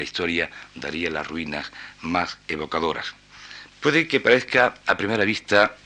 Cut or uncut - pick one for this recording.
cut